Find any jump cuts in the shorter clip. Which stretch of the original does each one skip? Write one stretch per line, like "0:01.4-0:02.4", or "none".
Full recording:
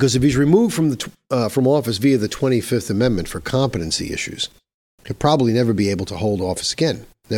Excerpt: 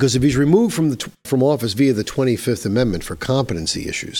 0:01.2-0:01.5

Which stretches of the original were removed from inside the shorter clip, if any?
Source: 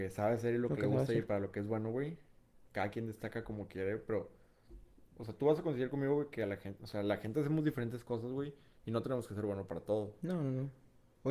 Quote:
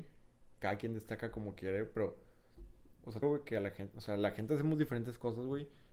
0:05.4-0:06.1

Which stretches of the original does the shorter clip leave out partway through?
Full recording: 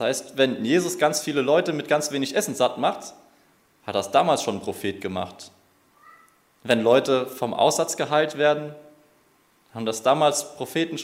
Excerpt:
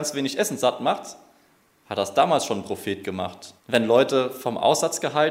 0:05.5-0:06.5

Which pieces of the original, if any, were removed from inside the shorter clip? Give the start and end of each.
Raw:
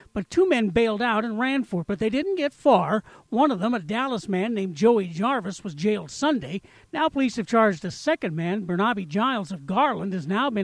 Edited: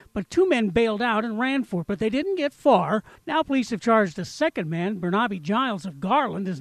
0:03.2-0:06.8

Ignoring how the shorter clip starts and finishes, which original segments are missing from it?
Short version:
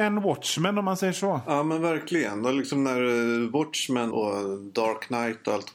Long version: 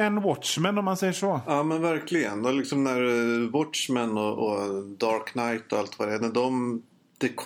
0:04.1-0:04.4

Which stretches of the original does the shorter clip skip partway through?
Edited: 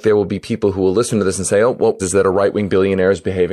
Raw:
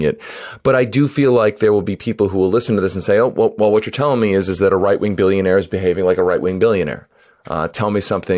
0:03.6-0:04.5

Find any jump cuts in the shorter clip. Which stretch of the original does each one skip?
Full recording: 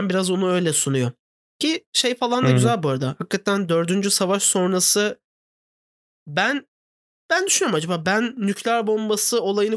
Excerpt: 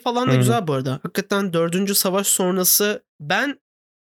0:05.2-0:06.2

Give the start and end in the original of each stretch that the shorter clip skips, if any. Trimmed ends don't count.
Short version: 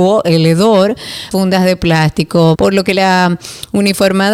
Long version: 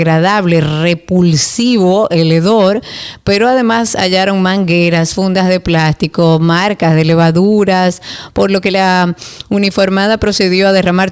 0:03.2-0:05.1
0:06.4-0:08.3

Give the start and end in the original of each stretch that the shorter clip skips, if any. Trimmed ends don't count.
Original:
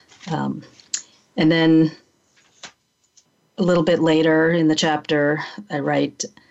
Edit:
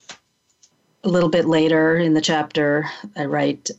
none

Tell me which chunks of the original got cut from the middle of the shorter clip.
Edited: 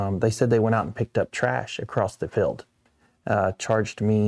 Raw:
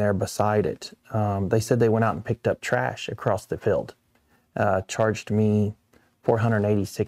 none

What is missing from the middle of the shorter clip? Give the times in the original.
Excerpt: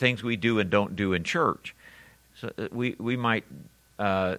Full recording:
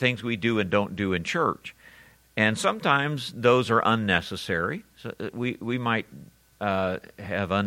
0:02.3-0:04.9

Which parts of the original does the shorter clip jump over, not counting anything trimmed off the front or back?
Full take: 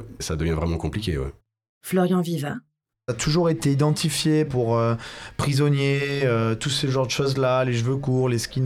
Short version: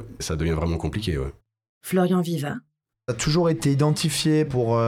none

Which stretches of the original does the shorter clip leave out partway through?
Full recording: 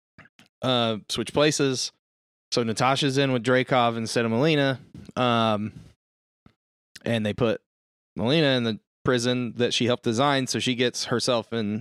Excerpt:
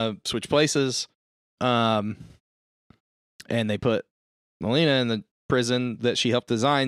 0:02.4-0:05.1

